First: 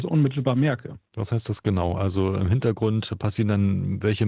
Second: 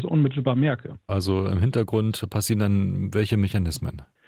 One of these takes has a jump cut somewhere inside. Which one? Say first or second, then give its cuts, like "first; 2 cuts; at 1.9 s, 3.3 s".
second; 1 cut; at 1.1 s